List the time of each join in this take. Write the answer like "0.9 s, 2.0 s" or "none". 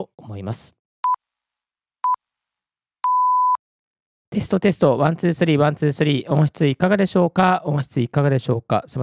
none